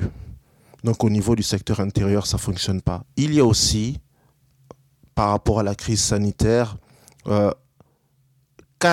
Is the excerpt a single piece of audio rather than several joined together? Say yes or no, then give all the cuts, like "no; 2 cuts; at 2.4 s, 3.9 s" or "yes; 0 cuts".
no; 1 cut; at 3.0 s